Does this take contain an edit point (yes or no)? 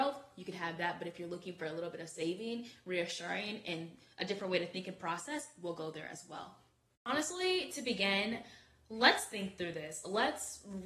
no